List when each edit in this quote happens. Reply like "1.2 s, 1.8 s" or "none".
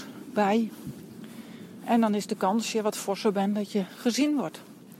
none